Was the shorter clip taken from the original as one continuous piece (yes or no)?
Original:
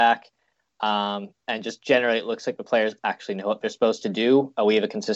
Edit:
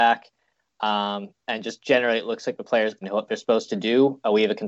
no